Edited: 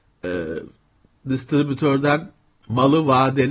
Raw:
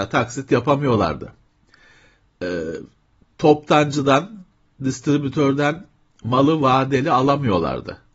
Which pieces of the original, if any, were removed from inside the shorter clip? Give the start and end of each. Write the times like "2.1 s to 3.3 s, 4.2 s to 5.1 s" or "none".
3.3 s to 4.7 s